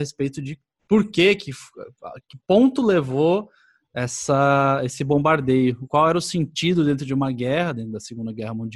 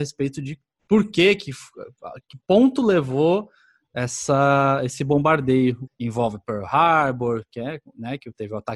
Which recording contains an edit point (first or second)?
second